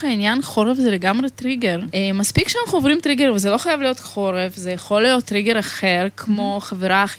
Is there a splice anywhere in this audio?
yes; 1 cut; at 1.9 s

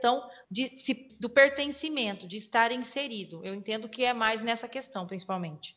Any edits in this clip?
yes; 1 cut; at 1.1 s

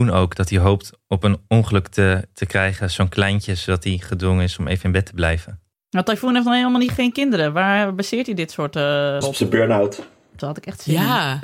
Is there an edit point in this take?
yes; 2 cuts; at 9.2 s, 10.4 s

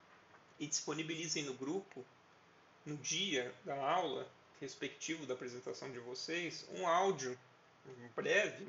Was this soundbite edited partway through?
yes; 1 cut; at 4.5 s

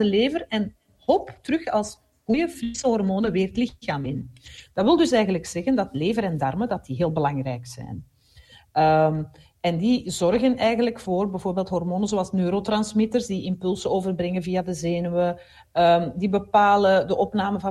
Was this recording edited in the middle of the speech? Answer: no; 0 cuts

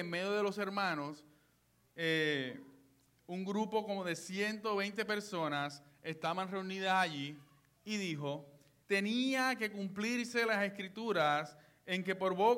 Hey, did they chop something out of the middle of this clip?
yes; 1 cut; at 8.8 s

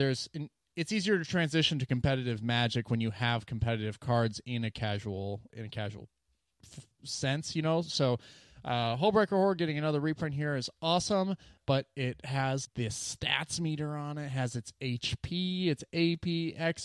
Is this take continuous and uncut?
no; 3 cuts; at 5.5 s, 11.6 s, 12.7 s

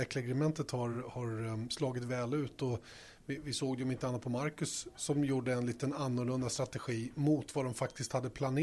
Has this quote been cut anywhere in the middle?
no; 0 cuts

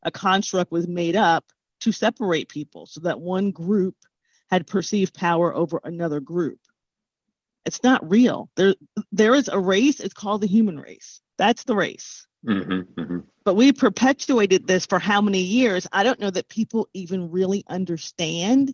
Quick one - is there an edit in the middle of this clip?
no; 0 cuts

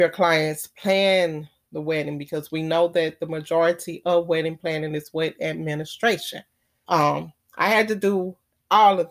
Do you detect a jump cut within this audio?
yes; 1 cut; at 6.8 s

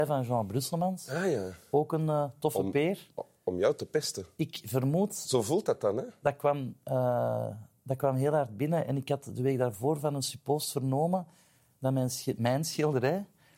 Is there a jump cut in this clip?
no; 0 cuts

